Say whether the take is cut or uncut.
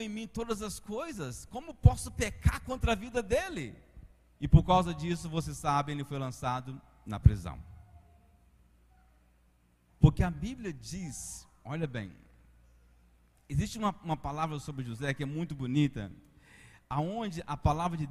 cut